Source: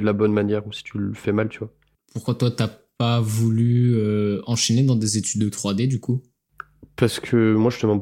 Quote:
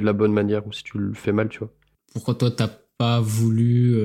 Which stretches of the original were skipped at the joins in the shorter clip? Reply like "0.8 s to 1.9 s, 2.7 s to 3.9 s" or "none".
none